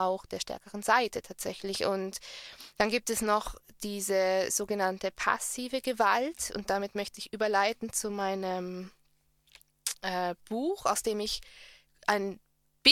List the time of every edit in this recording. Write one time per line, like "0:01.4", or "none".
none